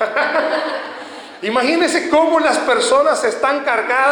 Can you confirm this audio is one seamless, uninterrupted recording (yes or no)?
yes